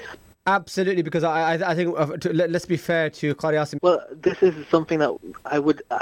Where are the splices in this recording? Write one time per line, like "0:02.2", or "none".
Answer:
0:03.8